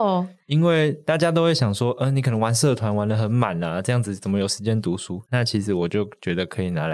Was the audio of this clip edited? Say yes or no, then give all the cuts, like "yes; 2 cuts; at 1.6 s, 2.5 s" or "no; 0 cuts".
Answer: yes; 1 cut; at 5.3 s